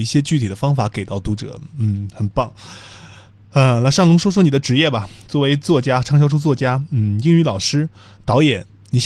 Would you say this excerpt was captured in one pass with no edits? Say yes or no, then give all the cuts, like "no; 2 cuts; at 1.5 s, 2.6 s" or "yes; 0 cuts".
yes; 0 cuts